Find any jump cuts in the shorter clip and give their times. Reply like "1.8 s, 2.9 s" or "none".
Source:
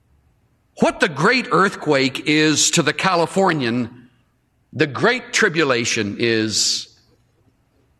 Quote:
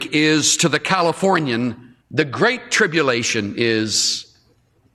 2.0 s